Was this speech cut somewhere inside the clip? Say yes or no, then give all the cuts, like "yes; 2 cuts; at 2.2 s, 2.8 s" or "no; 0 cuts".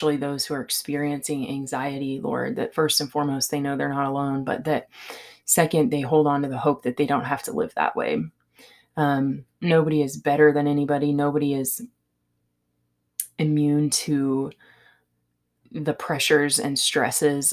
no; 0 cuts